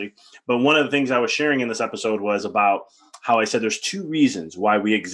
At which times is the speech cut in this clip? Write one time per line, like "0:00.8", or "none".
none